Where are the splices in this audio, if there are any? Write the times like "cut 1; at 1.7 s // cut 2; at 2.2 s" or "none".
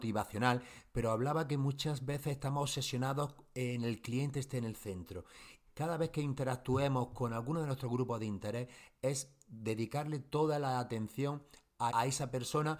cut 1; at 5.7 s // cut 2; at 11.9 s